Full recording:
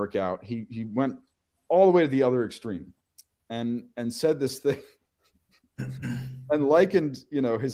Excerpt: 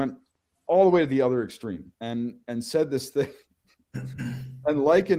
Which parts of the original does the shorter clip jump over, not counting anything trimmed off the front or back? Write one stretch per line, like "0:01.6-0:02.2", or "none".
0:03.0-0:03.4
0:04.9-0:05.3